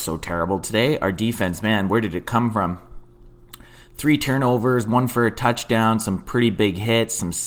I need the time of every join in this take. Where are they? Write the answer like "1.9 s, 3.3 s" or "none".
none